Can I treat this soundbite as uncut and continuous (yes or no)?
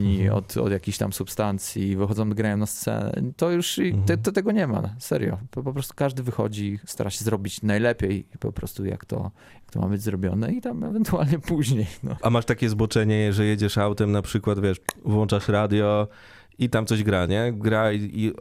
yes